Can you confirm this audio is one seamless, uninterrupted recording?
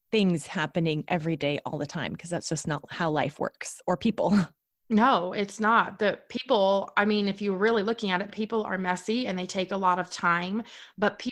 yes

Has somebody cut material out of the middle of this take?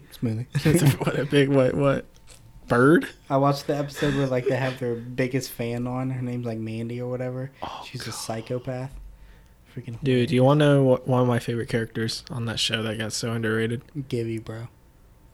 no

